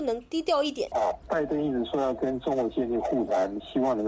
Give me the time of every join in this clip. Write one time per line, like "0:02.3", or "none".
0:00.9